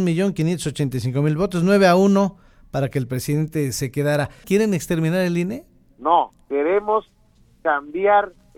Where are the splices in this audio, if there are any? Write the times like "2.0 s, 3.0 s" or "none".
4.4 s

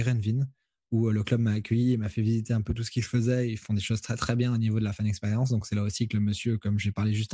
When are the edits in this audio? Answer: none

